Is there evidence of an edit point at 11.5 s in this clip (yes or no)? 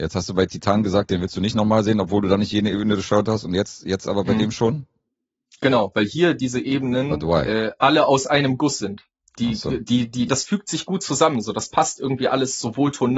no